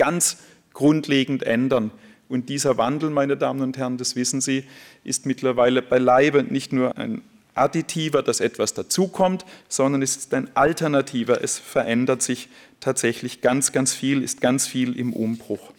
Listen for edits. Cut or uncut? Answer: cut